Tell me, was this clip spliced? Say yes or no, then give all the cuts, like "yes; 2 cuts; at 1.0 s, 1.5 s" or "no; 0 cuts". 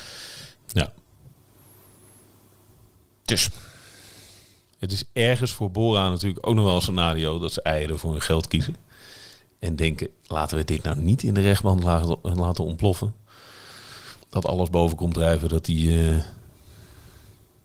yes; 1 cut; at 14.2 s